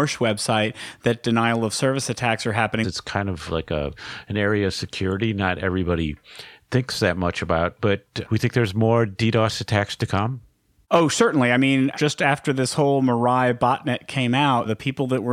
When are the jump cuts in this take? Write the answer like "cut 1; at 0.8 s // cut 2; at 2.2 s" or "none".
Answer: cut 1; at 2.8 s

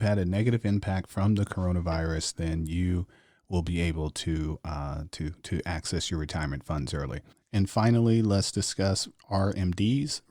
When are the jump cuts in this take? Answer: none

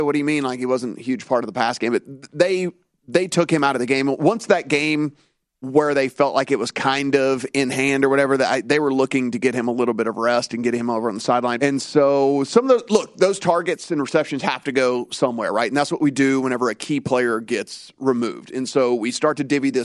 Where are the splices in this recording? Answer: cut 1; at 11.6 s

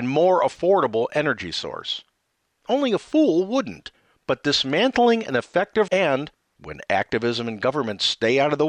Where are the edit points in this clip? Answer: cut 1; at 5.9 s

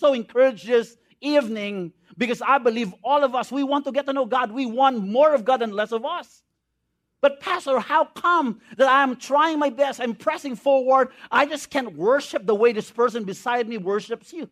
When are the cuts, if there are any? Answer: none

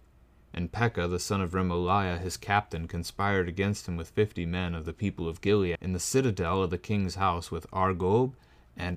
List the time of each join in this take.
cut 1; at 5.8 s

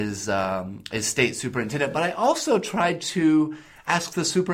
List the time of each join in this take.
none

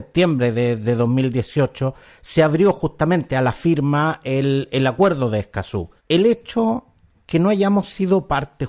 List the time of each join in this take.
cut 1; at 6.0 s

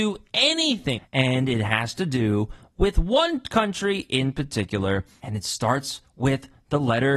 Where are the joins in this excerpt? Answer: cut 1; at 1.0 s // cut 2; at 5.2 s

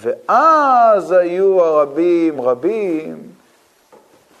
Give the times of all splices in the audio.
cut 1; at 2.3 s

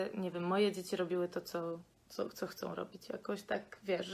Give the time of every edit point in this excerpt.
none

